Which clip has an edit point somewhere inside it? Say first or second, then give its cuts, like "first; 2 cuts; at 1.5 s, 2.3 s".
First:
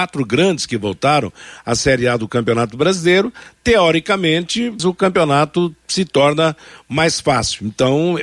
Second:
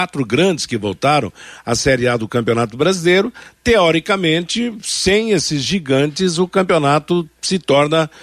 first; 1 cut; at 4.8 s